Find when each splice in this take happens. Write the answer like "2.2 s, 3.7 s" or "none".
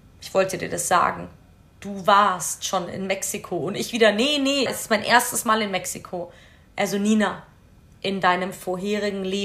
4.7 s

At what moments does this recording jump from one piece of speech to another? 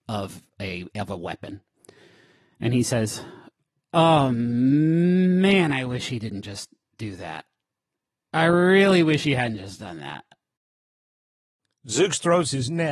none

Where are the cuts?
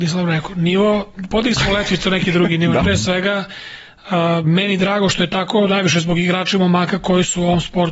2.8 s

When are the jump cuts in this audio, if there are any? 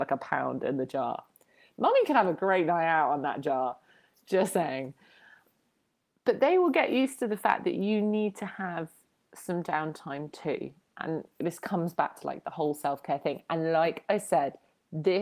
none

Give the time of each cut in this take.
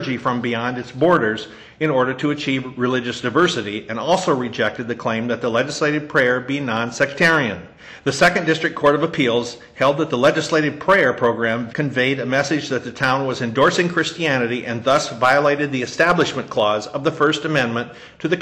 11.7 s

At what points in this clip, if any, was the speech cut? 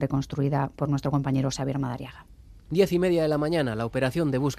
none

